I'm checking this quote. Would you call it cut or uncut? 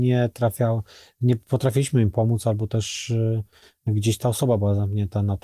uncut